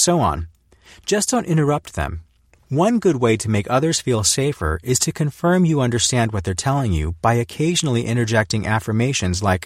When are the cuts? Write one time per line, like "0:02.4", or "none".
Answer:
0:02.5